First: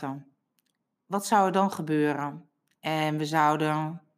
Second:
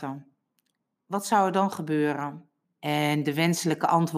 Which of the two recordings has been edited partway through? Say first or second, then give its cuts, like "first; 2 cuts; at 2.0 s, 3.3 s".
second; 1 cut; at 2.7 s